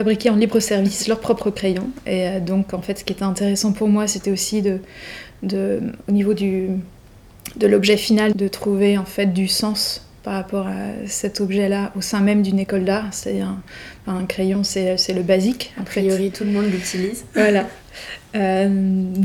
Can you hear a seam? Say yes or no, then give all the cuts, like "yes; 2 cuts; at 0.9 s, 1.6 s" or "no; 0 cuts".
yes; 1 cut; at 8.3 s